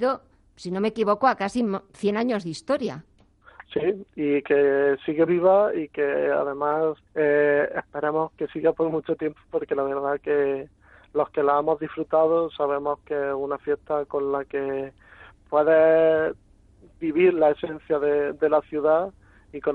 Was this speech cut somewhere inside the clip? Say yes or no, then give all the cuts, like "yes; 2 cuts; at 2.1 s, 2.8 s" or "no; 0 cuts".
yes; 2 cuts; at 5.3 s, 7.1 s